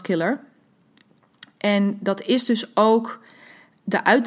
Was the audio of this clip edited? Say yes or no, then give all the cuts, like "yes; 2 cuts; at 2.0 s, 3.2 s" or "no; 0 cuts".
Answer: no; 0 cuts